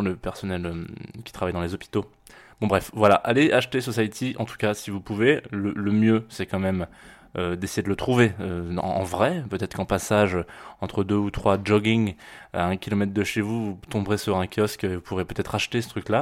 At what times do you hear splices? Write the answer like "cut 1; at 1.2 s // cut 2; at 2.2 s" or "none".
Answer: none